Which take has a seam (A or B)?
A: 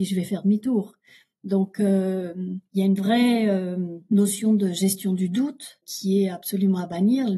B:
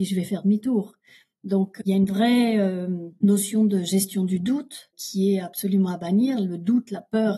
B